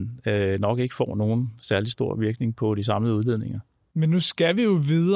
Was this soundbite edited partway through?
no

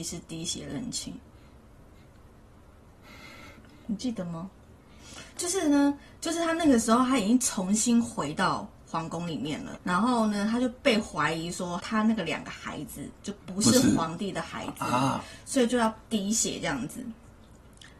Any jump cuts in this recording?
yes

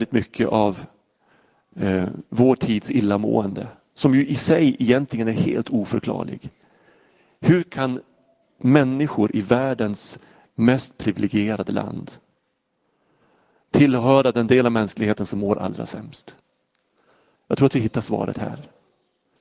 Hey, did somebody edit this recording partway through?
no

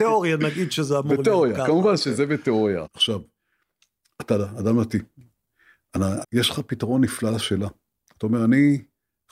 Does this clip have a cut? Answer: yes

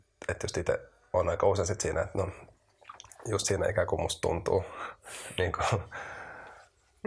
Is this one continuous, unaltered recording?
yes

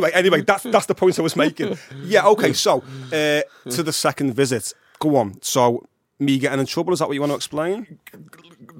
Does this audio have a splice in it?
no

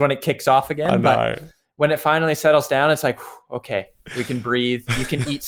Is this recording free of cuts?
yes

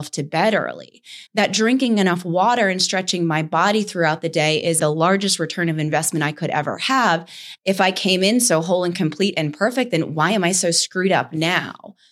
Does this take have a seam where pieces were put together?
yes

